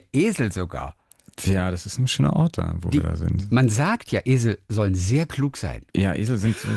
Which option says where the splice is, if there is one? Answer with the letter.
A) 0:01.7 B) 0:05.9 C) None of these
B